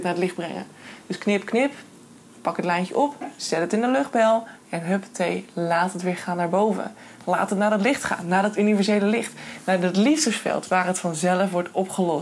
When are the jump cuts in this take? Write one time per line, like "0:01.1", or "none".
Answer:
none